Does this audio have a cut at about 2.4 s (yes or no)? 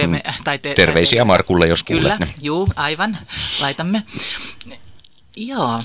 no